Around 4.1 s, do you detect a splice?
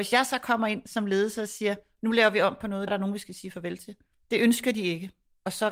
yes; 2 cuts; at 2.9 s, 4.1 s

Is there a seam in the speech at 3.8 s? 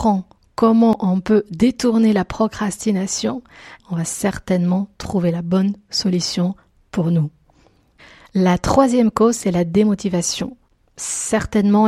yes; 1 cut; at 3.8 s

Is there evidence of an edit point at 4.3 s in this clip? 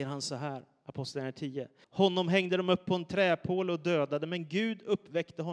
no; 1 cut; at 1.8 s

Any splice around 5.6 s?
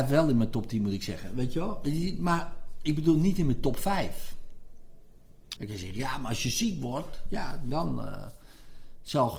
yes; 1 cut; at 5.6 s

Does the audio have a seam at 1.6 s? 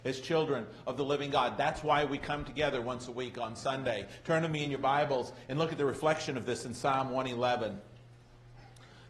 no; 0 cuts

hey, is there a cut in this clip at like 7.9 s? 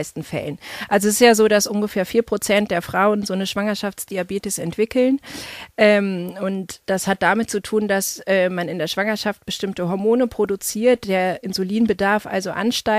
no; 0 cuts

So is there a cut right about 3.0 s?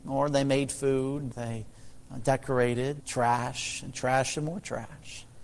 yes; 2 cuts; at 1.3 s, 3.0 s

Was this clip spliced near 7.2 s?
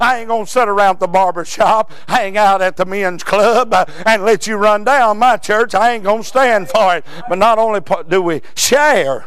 yes; 1 cut; at 7.2 s

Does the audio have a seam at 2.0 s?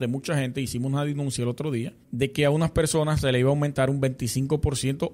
yes; 1 cut; at 2.0 s

